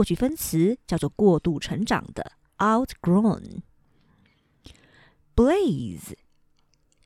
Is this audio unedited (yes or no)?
yes